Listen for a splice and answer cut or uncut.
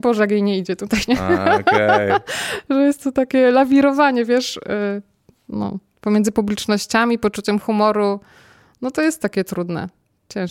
uncut